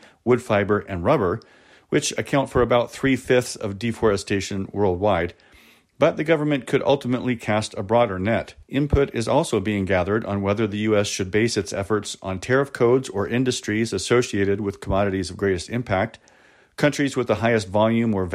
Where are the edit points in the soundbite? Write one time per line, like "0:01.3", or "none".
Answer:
0:08.6